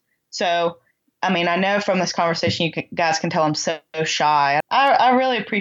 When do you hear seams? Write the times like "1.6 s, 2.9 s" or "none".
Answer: 4.6 s